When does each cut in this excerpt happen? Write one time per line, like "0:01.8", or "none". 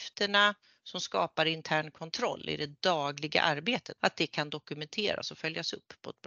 0:04.0

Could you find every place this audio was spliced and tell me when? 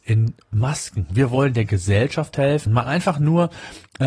0:02.7

